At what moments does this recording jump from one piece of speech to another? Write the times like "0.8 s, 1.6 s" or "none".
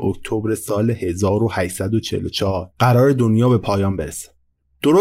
2.7 s

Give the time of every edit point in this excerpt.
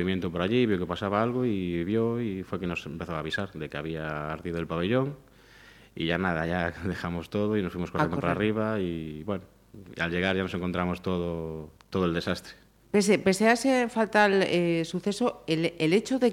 12.8 s

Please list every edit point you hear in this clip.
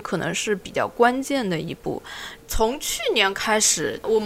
2.4 s

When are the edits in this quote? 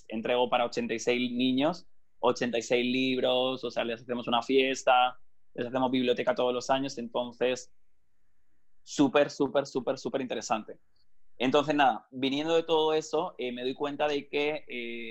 none

